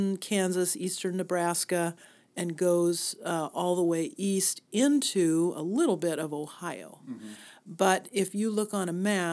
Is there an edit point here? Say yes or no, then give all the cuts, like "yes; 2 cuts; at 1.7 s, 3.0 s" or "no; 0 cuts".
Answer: no; 0 cuts